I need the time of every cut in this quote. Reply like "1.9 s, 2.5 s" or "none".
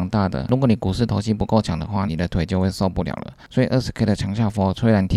2.1 s